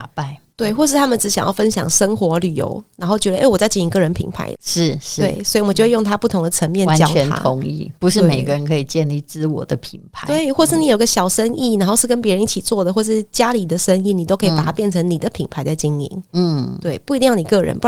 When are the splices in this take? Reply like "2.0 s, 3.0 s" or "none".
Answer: 4.5 s